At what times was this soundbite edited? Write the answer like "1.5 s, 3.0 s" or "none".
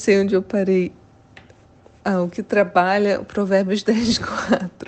none

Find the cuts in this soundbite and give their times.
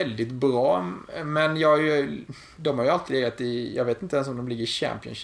none

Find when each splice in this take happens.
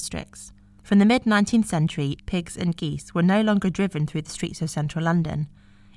2.2 s

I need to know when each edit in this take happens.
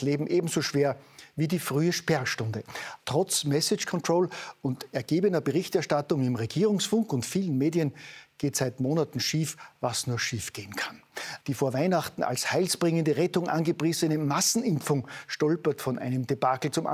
3.0 s, 11.4 s

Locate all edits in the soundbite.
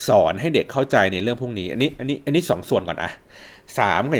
none

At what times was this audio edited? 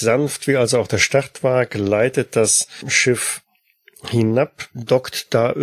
none

